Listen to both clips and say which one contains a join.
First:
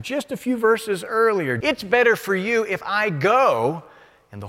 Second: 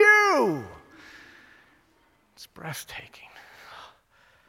first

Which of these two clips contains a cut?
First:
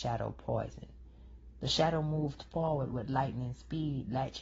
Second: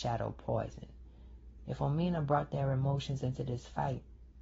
first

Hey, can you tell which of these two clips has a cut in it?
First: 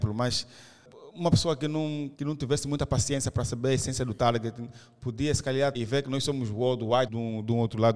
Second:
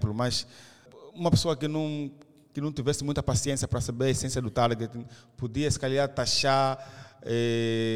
first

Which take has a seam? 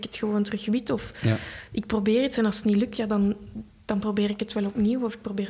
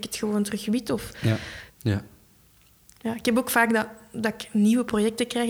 second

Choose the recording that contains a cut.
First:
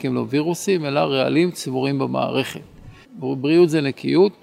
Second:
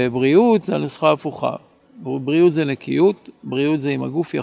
first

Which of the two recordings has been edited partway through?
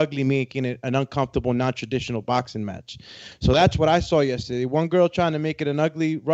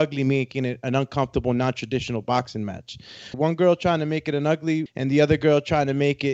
second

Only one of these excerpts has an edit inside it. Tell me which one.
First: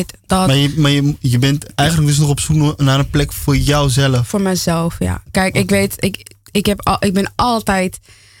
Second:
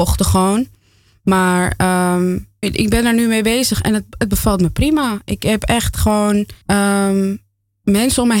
second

